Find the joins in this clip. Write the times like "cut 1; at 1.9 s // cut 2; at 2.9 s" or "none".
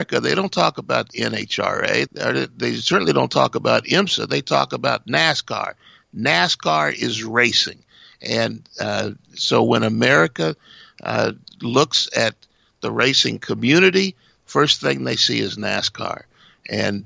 cut 1; at 2.1 s